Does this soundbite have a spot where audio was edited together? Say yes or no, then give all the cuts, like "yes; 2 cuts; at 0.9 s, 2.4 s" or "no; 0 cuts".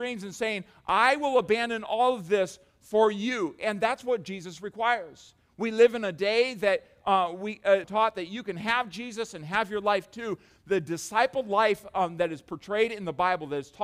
yes; 1 cut; at 7.8 s